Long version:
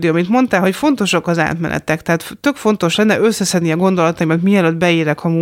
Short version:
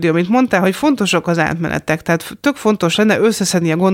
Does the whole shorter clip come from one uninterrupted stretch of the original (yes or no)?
yes